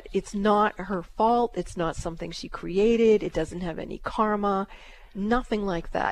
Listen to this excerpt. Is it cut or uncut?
uncut